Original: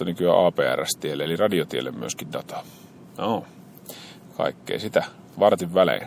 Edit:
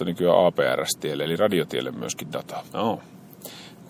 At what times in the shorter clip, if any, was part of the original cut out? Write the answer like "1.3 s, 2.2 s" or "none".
2.7 s